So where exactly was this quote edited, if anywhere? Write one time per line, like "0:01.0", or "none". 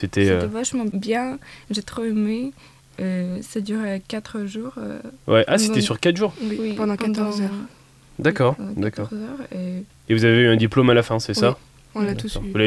none